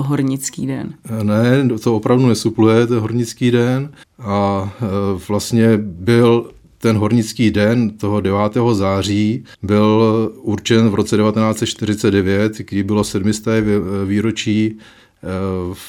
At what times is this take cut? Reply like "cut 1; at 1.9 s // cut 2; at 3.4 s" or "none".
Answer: cut 1; at 4.0 s // cut 2; at 9.5 s